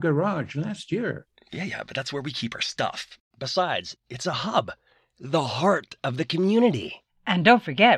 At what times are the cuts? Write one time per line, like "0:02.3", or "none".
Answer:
0:04.0